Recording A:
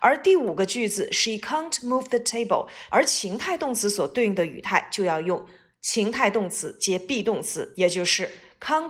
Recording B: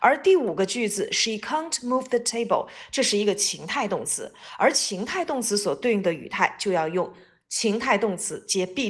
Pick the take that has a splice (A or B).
A